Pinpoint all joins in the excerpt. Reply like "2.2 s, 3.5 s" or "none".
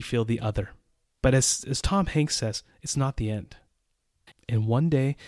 4.3 s